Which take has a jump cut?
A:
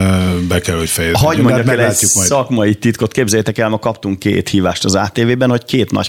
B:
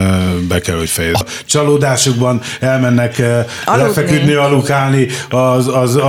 B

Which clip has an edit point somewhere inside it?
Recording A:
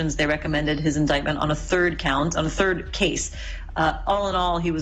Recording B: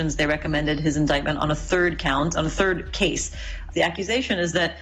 B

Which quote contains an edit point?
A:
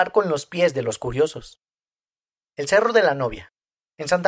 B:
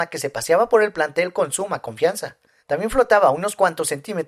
B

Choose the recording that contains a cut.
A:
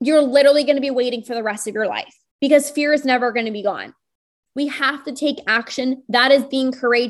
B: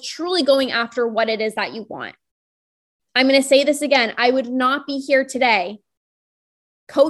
A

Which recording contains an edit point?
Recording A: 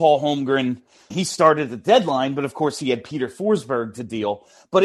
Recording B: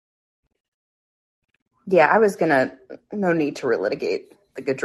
A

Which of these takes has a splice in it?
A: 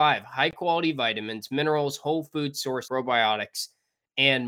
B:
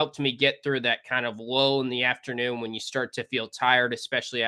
A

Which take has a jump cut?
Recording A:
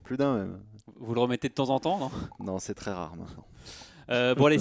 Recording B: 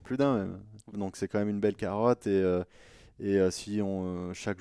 B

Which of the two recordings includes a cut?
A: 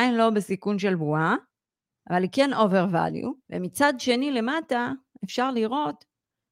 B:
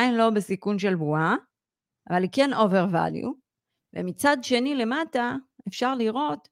A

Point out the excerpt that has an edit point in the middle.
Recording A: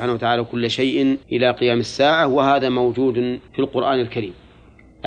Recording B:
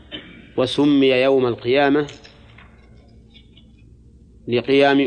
A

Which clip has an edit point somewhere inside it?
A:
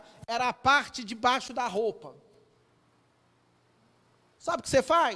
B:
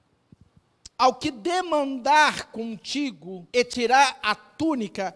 B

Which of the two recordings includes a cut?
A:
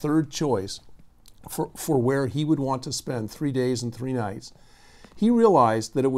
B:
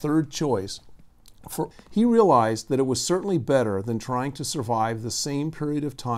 B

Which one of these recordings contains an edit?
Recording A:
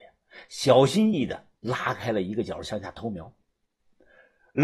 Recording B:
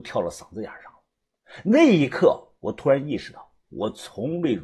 A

